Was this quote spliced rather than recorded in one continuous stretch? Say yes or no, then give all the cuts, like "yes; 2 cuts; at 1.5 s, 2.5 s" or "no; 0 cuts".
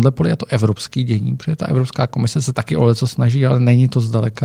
no; 0 cuts